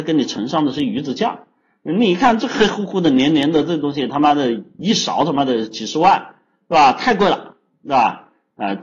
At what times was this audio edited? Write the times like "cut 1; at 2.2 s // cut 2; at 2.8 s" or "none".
none

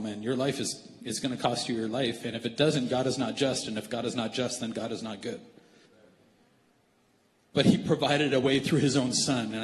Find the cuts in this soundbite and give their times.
none

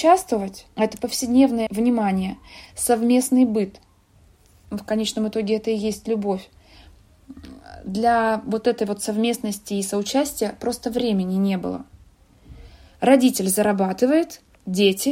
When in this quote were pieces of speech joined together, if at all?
cut 1; at 2.7 s

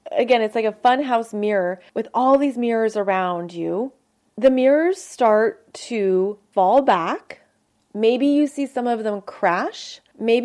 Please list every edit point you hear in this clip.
none

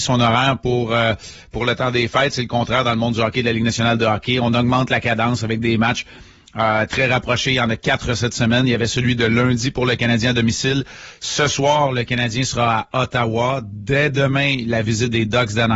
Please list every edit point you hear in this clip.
none

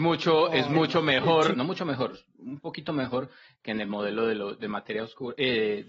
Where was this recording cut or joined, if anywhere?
cut 1; at 1.5 s

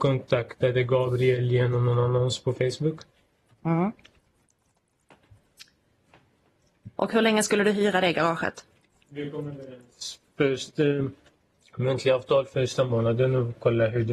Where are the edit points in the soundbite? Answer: none

